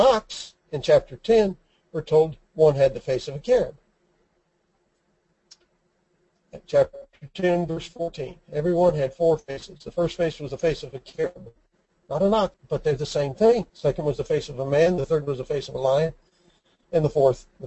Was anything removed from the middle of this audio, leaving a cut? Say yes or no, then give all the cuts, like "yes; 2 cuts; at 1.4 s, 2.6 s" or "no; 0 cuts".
yes; 2 cuts; at 12.5 s, 13.7 s